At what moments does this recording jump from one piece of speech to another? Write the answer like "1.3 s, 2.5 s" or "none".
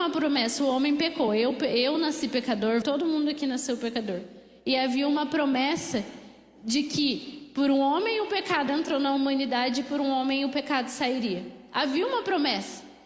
2.8 s